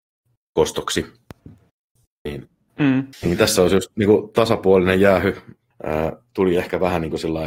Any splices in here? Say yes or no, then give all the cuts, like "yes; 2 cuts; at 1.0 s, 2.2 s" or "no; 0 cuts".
yes; 2 cuts; at 3.1 s, 5.7 s